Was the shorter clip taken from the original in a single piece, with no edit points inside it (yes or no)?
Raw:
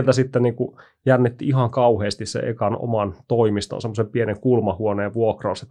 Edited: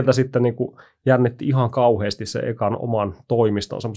yes